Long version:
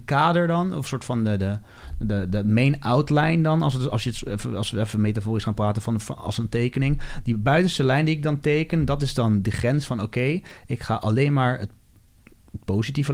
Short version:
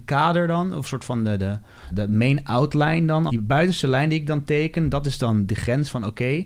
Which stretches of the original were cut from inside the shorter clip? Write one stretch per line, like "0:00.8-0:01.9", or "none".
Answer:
0:01.9-0:02.3
0:03.6-0:07.2